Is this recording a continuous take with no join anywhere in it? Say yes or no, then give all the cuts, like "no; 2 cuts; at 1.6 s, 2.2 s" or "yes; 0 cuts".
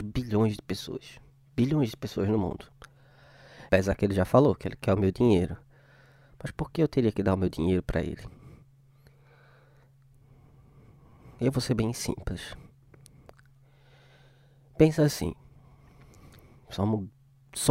no; 1 cut; at 3.7 s